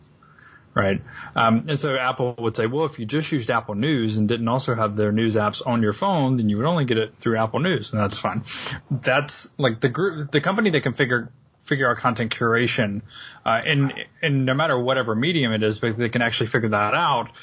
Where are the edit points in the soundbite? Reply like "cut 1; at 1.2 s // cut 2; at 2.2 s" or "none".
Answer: cut 1; at 8.8 s